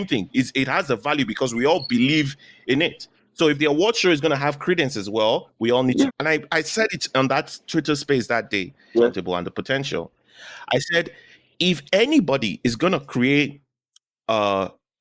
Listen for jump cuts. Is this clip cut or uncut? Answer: cut